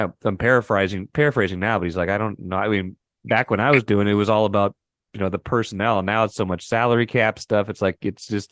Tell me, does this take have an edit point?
no; 0 cuts

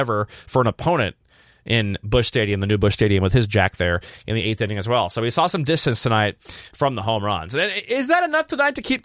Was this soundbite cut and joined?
no; 0 cuts

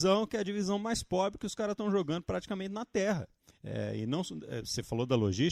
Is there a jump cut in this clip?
yes; 1 cut; at 3.5 s

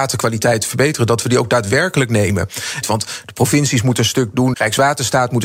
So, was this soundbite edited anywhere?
yes; 2 cuts; at 2.8 s, 4.5 s

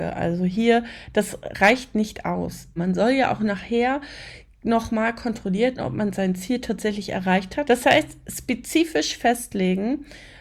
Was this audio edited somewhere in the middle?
yes; 2 cuts; at 2.8 s, 7.6 s

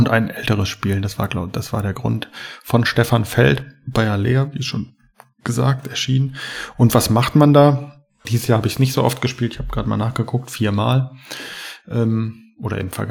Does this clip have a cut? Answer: yes; 1 cut; at 8.2 s

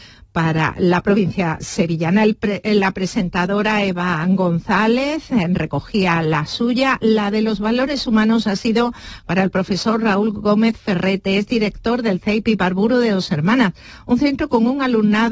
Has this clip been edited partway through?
no; 0 cuts

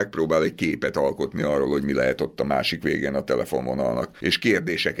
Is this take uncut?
yes; 0 cuts

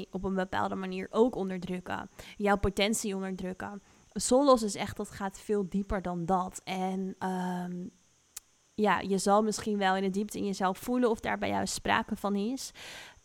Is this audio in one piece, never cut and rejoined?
yes; 0 cuts

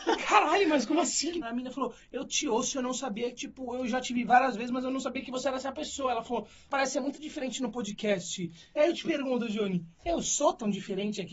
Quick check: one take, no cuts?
no; 1 cut; at 1.4 s

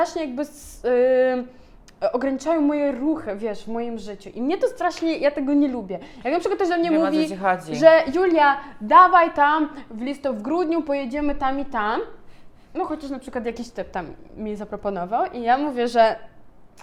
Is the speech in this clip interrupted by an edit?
no; 0 cuts

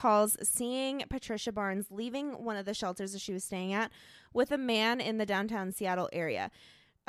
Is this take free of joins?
yes; 0 cuts

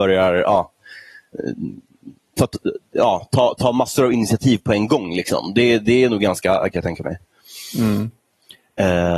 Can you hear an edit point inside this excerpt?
yes; 1 cut; at 6.7 s

